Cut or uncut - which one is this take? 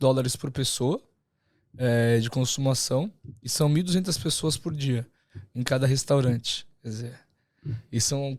uncut